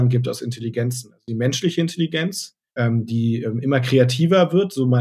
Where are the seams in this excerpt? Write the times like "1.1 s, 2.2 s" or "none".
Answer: 2.7 s